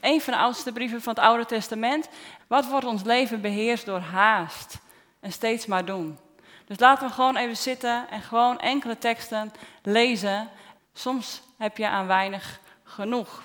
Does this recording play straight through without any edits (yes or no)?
no